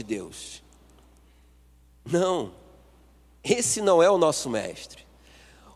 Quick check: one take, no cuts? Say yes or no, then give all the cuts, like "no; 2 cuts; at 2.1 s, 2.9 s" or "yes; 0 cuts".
yes; 0 cuts